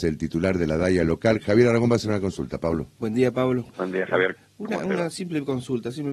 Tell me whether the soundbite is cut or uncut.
cut